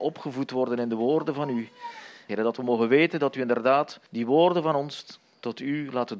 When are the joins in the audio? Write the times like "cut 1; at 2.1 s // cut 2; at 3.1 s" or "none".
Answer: cut 1; at 2.3 s // cut 2; at 4.1 s

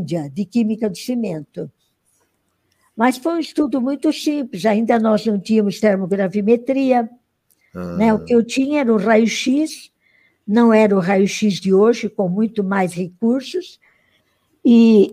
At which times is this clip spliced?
none

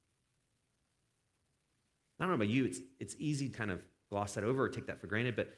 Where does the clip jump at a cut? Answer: cut 1; at 3.5 s

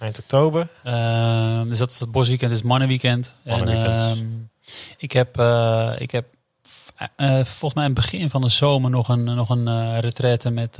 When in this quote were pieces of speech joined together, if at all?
none

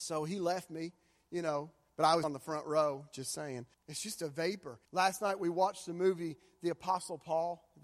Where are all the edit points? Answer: cut 1; at 2.2 s // cut 2; at 3.7 s // cut 3; at 4.8 s

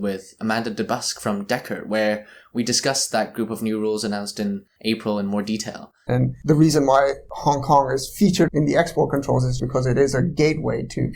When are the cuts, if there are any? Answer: cut 1; at 6.1 s // cut 2; at 8.5 s // cut 3; at 9.6 s

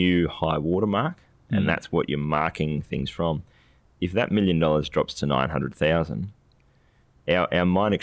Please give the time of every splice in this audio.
none

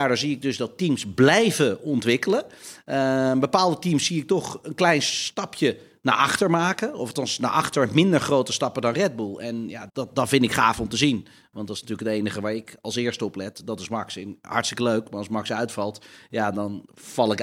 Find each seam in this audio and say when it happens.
cut 1; at 9.9 s

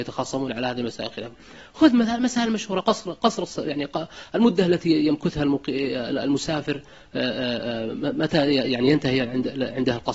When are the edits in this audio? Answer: none

